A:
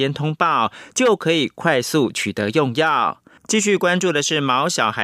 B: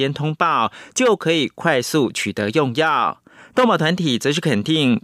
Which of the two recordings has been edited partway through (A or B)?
A